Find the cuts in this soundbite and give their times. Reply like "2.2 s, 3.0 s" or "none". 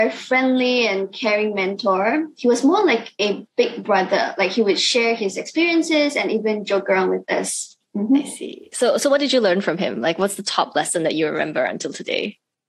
none